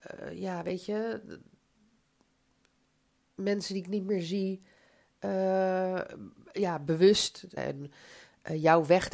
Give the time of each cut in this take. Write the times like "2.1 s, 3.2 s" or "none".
7.6 s